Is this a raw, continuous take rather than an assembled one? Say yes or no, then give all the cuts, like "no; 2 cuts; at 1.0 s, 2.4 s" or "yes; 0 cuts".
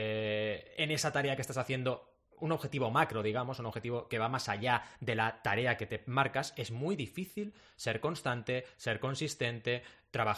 yes; 0 cuts